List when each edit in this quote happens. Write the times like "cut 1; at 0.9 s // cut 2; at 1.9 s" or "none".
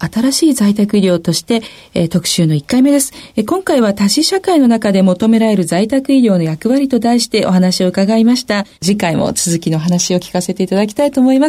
cut 1; at 8.7 s